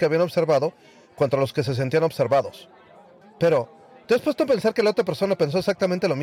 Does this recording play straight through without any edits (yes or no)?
no